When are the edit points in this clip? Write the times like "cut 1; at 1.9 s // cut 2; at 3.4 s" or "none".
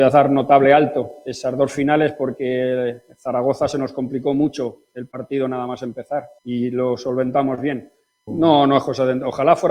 cut 1; at 6.4 s // cut 2; at 8.3 s